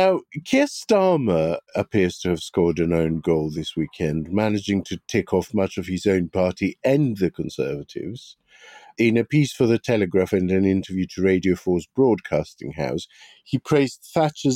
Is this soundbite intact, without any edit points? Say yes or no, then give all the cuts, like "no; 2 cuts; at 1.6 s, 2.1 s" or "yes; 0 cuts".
yes; 0 cuts